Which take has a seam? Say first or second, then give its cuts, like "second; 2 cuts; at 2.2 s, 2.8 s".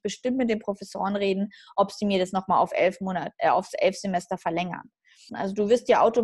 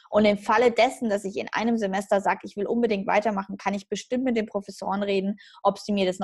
first; 1 cut; at 5.3 s